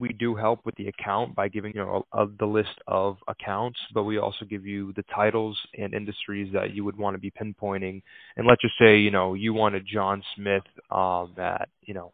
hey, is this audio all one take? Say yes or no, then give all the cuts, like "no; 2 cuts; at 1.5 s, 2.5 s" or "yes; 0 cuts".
no; 1 cut; at 1.7 s